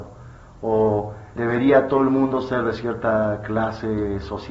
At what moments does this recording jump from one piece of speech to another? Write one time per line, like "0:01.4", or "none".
0:01.4